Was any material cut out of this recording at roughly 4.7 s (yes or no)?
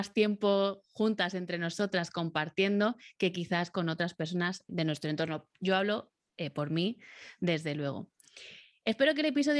yes